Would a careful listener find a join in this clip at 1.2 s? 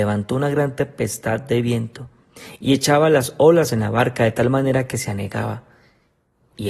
no; 0 cuts

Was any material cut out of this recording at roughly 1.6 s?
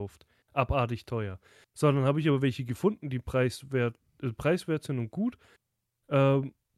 no; 0 cuts

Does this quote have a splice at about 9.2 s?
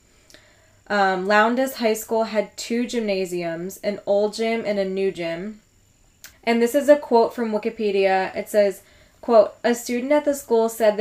no; 1 cut; at 6.3 s

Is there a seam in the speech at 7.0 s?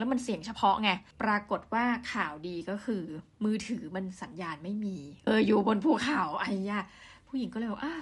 no; 1 cut; at 5.3 s

